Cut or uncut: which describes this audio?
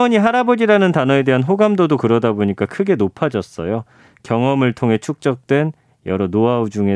uncut